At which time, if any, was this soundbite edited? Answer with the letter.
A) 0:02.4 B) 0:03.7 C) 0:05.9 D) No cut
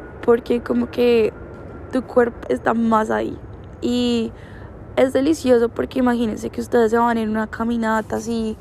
A